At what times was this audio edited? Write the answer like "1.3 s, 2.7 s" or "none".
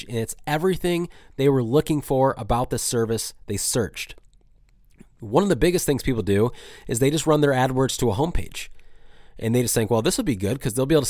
none